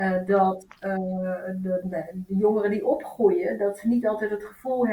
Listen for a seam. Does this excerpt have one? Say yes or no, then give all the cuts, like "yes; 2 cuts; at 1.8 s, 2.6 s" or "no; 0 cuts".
yes; 1 cut; at 1.8 s